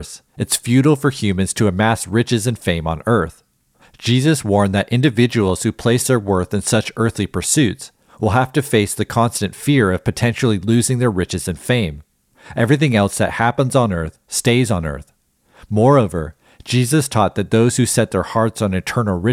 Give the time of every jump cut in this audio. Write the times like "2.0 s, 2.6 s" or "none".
12.3 s